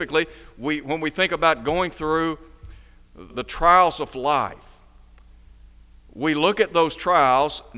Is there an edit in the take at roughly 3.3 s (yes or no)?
yes